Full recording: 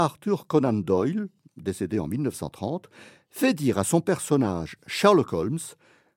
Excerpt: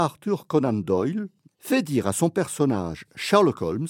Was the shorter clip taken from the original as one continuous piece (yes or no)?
no